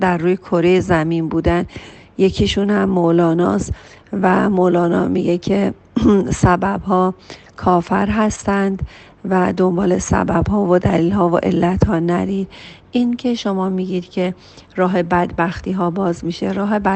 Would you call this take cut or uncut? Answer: uncut